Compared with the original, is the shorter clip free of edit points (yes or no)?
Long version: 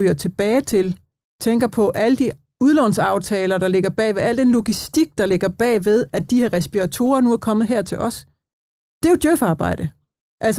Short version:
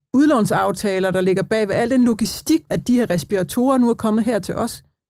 no